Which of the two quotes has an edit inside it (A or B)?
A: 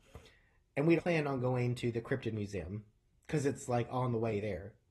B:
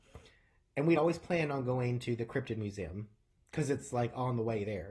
A